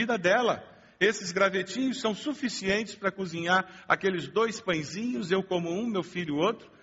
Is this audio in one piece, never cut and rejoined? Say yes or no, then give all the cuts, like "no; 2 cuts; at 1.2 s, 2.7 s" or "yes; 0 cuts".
yes; 0 cuts